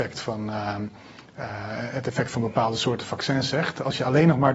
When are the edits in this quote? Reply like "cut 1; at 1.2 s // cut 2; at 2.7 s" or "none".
none